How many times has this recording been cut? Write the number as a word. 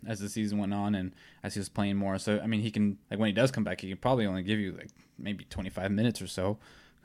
one